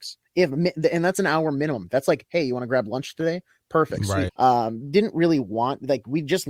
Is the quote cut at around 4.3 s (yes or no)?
yes